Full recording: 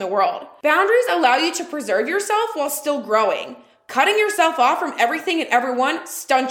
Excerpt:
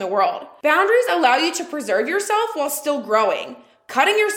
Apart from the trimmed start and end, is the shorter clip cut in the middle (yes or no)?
no